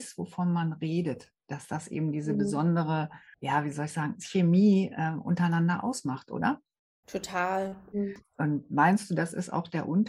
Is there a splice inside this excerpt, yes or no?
yes